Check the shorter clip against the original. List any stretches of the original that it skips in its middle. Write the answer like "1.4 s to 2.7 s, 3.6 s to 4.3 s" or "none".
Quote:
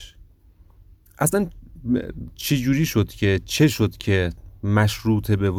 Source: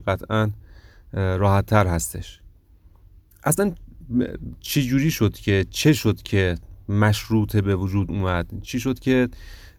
none